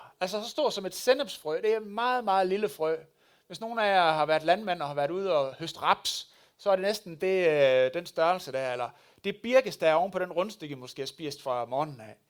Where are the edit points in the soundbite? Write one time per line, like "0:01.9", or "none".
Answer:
none

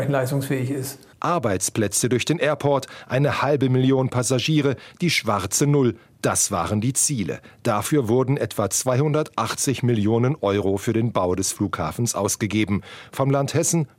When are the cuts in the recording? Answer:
none

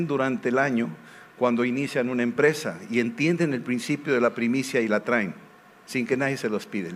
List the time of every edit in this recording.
none

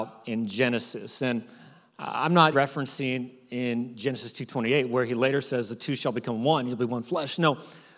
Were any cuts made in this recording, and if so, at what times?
0:02.5

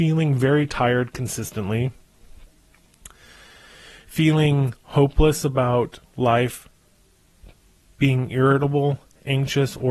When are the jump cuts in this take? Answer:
none

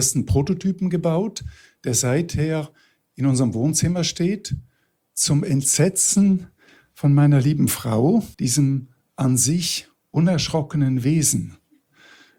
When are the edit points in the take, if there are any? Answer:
0:08.3

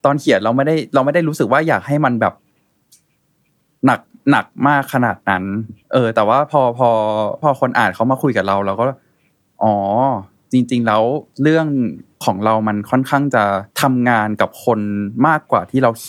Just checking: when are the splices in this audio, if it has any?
0:05.8
0:11.3
0:13.7

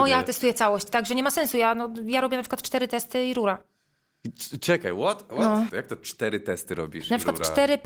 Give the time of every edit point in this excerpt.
0:05.7

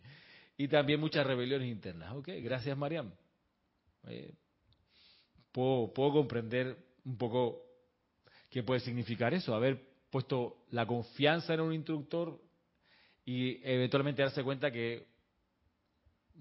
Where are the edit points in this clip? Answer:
none

